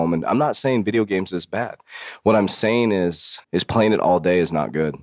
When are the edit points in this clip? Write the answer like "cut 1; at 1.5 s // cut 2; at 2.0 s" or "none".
cut 1; at 3.4 s